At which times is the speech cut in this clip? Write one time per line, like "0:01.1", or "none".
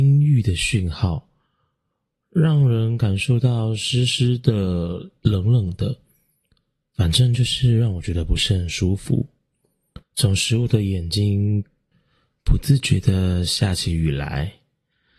0:10.0